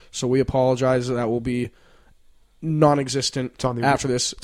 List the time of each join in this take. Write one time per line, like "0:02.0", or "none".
none

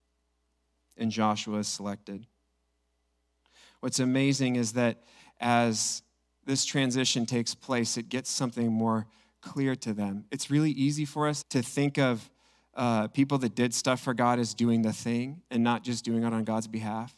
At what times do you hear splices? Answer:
0:11.4

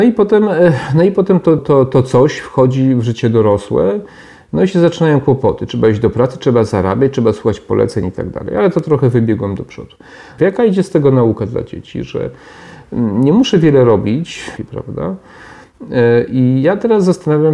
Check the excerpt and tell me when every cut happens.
0:01.6
0:10.4
0:14.6

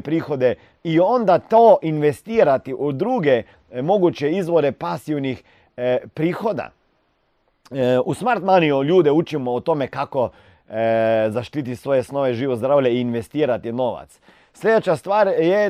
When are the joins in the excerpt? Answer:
none

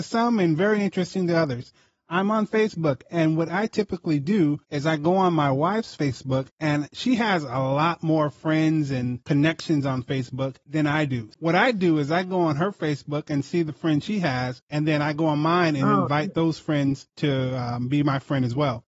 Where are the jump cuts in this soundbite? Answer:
none

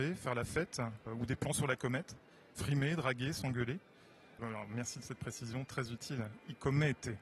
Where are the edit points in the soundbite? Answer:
0:01.1
0:04.4

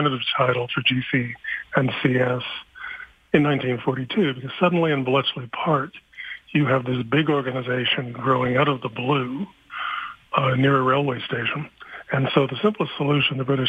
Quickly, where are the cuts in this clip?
none

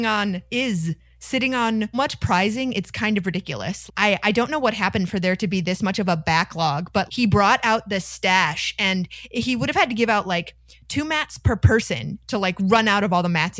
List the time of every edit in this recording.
0:01.9
0:03.9
0:07.1

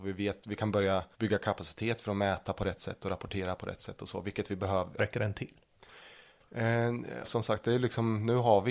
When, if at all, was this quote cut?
0:01.1
0:05.0
0:07.2

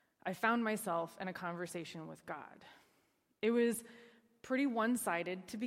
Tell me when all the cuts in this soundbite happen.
none

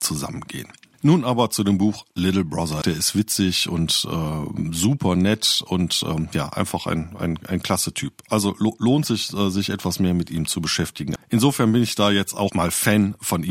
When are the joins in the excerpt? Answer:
0:02.8
0:11.2
0:12.5

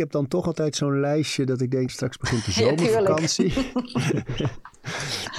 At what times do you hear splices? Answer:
0:01.9

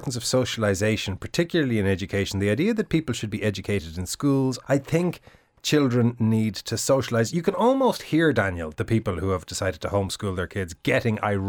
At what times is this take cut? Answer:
0:04.6

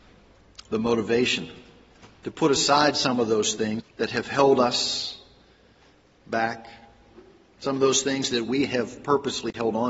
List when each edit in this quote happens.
0:03.8

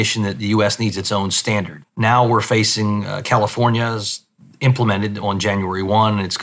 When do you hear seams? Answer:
0:01.8

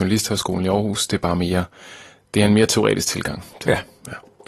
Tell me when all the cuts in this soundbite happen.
none

